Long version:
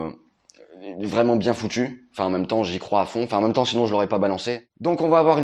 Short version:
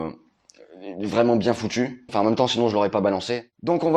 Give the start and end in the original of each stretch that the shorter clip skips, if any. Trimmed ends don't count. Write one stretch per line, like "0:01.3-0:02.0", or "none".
0:02.1-0:03.3